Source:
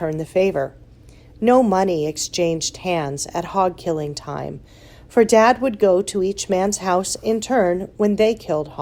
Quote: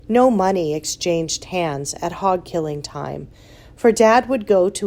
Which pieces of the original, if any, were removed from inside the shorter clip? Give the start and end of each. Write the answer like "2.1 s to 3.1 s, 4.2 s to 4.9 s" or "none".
none